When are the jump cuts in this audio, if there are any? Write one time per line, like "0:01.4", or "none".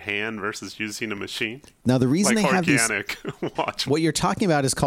0:01.8
0:03.9